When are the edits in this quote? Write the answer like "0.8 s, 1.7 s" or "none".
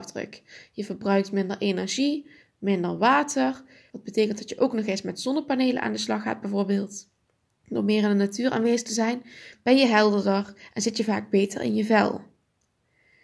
3.9 s, 7.5 s, 9.5 s